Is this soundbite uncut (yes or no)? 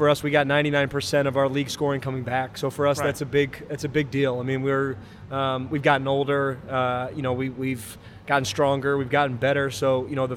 yes